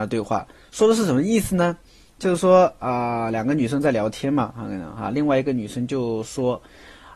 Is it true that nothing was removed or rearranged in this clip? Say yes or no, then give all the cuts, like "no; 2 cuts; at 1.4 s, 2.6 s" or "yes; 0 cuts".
yes; 0 cuts